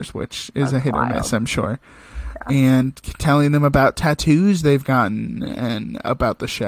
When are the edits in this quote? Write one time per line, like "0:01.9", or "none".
none